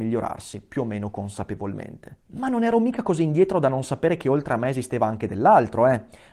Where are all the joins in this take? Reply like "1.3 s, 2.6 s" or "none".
2.2 s